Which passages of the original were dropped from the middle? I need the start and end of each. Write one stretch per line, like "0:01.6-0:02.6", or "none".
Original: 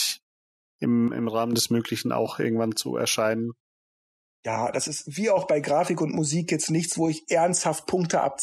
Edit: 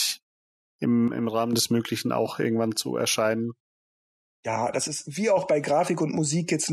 none